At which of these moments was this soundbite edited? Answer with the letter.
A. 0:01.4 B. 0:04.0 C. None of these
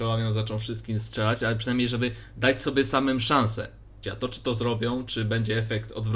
B